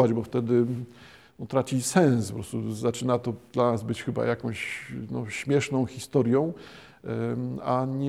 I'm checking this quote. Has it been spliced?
no; 0 cuts

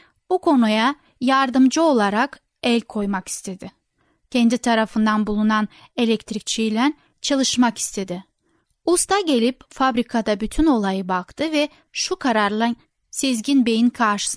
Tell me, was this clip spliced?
no; 0 cuts

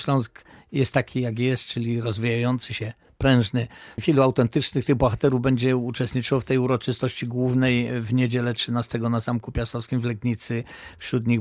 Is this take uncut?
no; 1 cut; at 4.0 s

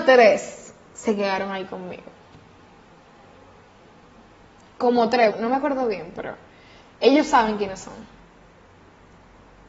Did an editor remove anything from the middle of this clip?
yes; 1 cut; at 5.3 s

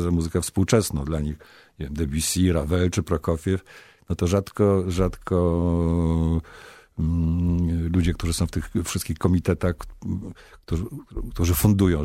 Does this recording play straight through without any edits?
yes; 0 cuts

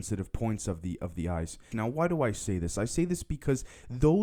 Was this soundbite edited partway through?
yes; 1 cut; at 1.7 s

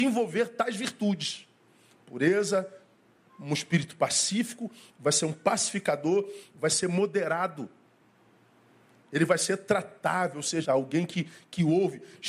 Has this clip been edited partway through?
yes; 1 cut; at 10.6 s

